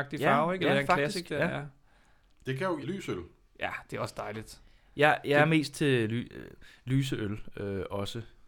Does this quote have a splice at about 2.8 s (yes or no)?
yes